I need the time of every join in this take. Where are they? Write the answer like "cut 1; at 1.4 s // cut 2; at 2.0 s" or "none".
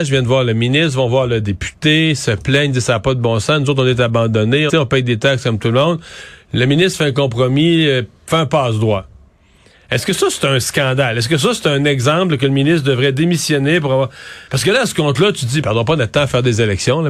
cut 1; at 4.7 s // cut 2; at 14.5 s // cut 3; at 15.6 s